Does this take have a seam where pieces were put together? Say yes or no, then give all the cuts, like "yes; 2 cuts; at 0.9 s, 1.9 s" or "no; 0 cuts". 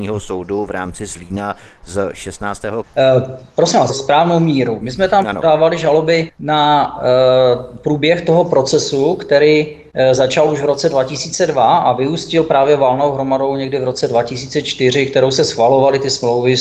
yes; 3 cuts; at 2.8 s, 3.9 s, 6.3 s